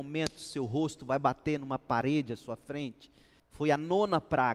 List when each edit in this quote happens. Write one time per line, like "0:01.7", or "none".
0:03.4

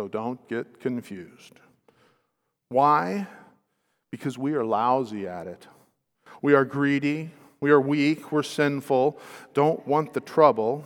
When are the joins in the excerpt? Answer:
none

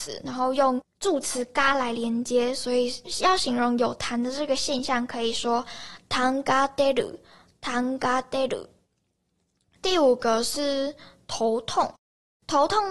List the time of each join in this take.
none

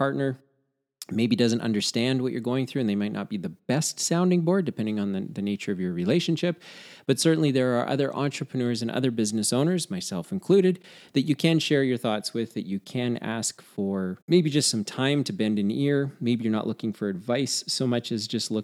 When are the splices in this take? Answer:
0:14.2

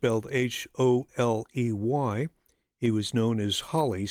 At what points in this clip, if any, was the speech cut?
0:01.1

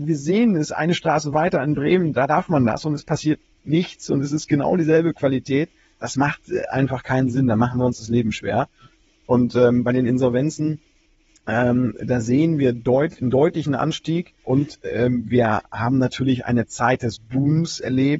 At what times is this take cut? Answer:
0:06.0
0:14.4

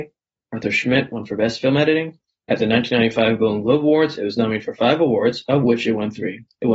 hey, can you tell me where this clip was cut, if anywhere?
0:02.4

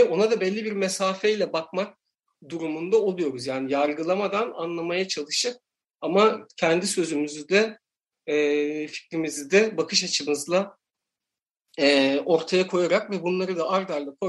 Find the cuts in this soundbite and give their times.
none

